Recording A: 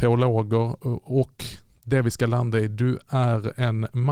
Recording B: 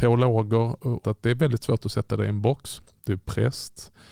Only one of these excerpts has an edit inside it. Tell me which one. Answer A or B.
B